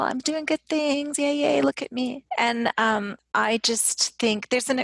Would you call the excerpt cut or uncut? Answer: uncut